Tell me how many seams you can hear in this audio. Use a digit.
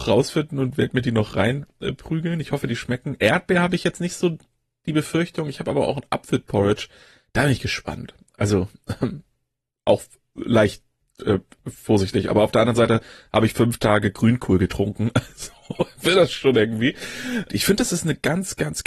1